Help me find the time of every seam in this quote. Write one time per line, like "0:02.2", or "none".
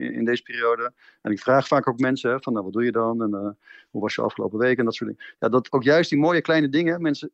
0:05.7